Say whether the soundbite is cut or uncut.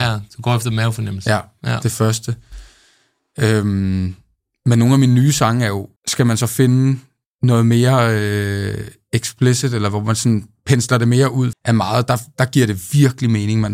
cut